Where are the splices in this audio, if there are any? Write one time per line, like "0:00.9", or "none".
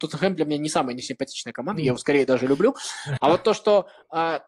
0:03.2